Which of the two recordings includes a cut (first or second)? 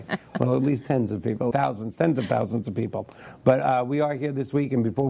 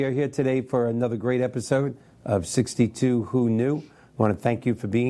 first